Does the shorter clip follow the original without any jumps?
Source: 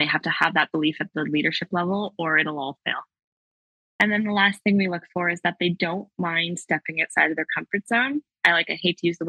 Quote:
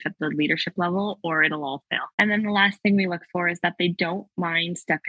no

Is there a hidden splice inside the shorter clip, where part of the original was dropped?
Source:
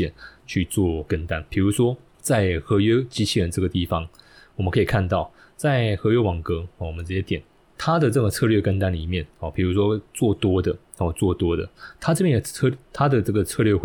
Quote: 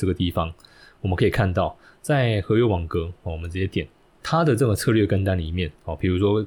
no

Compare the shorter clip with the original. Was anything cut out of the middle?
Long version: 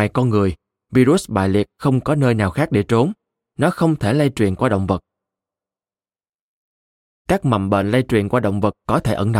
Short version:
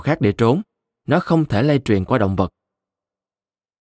no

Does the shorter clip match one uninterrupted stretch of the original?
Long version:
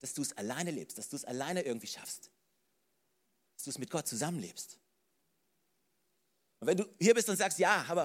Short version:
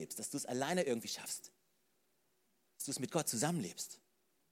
yes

